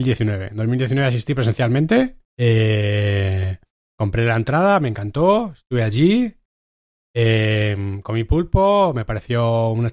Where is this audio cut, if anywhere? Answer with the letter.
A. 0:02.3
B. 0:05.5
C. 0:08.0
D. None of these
A